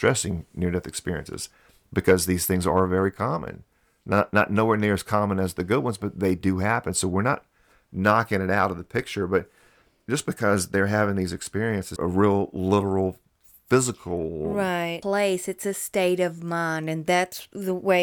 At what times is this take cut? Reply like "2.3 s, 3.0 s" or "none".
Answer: 12.0 s, 15.0 s